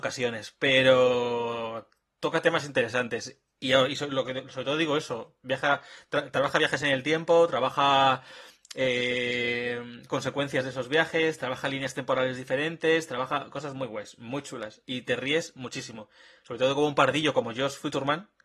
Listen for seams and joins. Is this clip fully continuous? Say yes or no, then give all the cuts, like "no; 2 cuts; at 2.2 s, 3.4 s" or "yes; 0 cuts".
yes; 0 cuts